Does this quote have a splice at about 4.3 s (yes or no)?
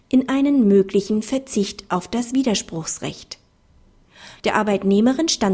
yes